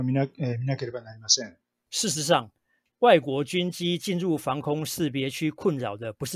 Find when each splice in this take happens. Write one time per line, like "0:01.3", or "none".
none

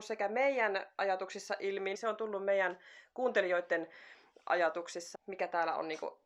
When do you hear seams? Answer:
0:01.9
0:05.1

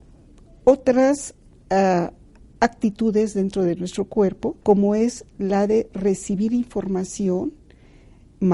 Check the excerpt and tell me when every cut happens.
0:04.6

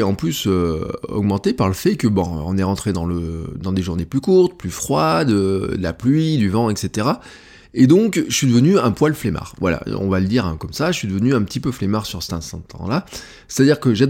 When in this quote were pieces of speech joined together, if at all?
none

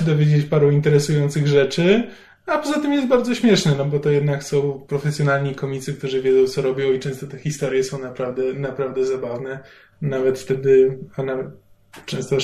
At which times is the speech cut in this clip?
none

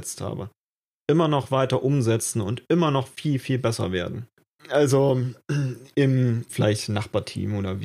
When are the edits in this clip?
0:04.6
0:06.5

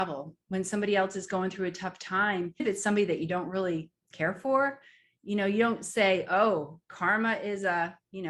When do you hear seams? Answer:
0:02.6

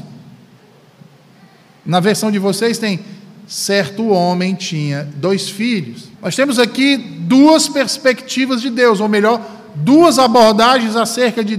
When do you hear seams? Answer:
0:06.1

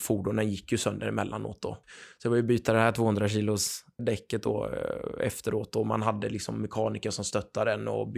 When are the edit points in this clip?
0:01.8
0:04.0

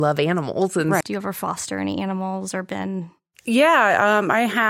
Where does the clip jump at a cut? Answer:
0:01.0

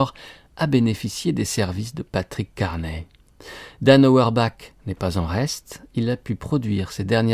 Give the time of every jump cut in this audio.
none

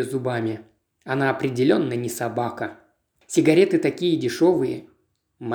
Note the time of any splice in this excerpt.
0:03.2

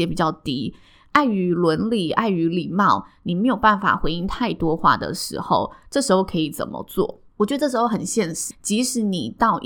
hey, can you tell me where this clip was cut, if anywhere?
0:07.3
0:08.5

